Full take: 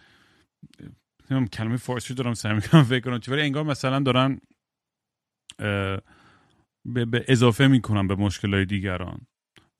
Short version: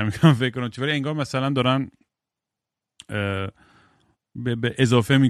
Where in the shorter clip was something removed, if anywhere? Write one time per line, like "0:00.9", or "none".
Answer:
none